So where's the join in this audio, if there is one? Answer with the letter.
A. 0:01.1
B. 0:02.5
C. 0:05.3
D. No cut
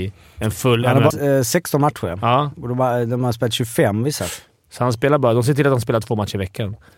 A